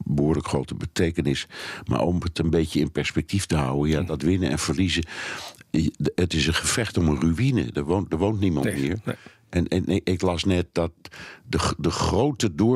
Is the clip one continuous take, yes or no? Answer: yes